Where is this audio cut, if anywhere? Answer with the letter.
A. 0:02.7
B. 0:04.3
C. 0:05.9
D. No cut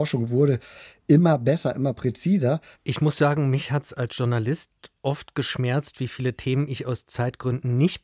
A